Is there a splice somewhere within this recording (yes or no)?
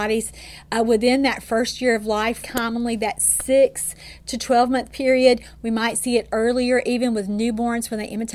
yes